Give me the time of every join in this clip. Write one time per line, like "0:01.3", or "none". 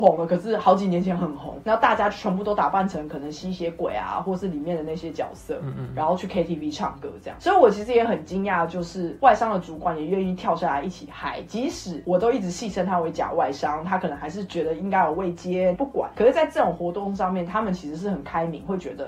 0:15.7